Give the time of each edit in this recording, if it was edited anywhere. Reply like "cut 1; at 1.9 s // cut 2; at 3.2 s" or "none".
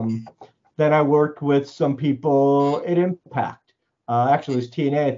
none

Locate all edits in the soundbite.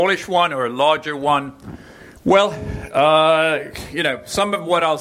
cut 1; at 2.2 s

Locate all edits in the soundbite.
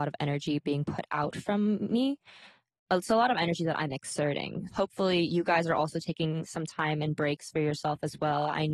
cut 1; at 4.7 s

